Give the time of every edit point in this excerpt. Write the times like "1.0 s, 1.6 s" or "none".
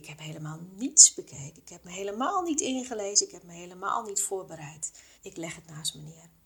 5.1 s